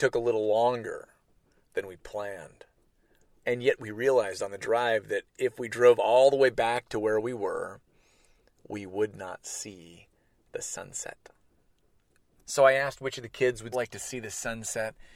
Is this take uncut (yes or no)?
no